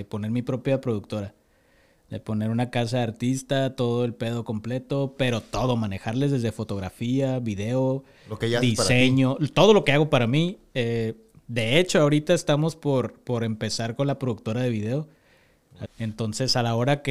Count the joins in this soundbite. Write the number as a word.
one